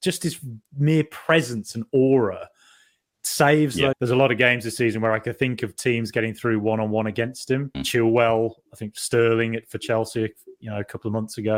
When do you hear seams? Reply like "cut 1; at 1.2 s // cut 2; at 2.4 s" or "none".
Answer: cut 1; at 3.9 s // cut 2; at 7.7 s